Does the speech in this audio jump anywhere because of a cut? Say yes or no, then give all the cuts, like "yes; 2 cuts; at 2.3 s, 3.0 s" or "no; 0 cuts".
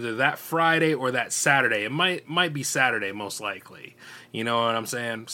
no; 0 cuts